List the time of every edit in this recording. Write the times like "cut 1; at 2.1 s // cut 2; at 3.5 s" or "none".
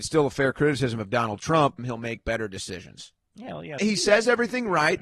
cut 1; at 1.8 s // cut 2; at 3.8 s